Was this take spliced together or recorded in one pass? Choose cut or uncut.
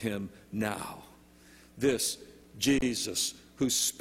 uncut